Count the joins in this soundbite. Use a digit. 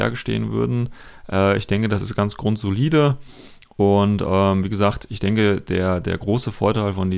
0